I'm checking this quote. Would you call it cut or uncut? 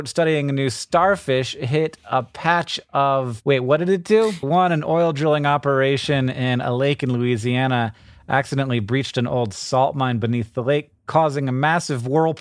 cut